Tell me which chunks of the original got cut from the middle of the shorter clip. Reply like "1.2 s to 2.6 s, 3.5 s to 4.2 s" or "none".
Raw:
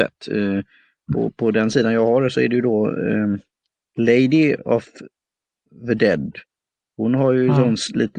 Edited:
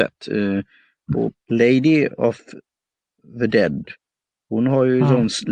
1.3 s to 3.8 s